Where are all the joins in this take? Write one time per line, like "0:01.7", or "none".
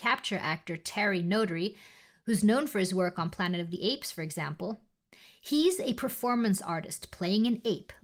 none